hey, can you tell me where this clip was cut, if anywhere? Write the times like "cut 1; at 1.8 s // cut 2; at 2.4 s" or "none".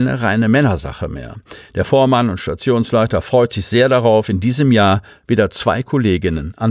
none